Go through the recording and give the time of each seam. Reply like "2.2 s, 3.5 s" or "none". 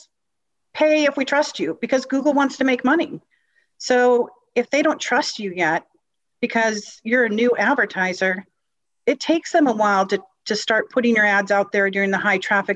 none